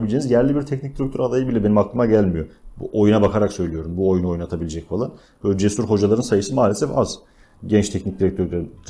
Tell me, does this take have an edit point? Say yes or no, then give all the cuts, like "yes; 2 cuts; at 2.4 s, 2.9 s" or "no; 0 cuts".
no; 0 cuts